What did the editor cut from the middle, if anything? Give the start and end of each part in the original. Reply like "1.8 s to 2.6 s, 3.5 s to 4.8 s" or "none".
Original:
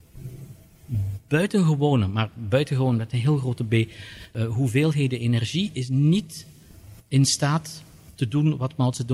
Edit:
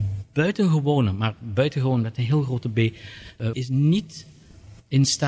4.5 s to 5.7 s